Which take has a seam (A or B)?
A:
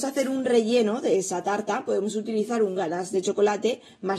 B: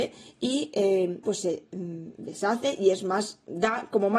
B